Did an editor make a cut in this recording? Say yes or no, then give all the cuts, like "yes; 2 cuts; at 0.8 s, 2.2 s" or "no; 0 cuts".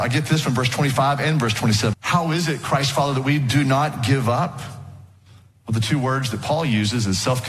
yes; 1 cut; at 1.9 s